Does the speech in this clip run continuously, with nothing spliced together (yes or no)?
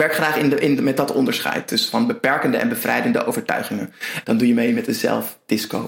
no